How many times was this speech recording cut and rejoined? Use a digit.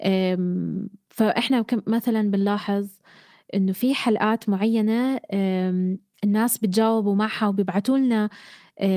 0